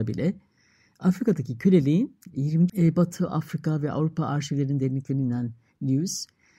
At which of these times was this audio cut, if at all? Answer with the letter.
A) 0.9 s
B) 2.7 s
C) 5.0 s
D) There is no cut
B